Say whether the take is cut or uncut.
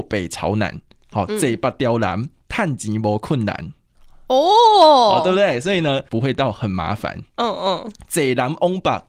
cut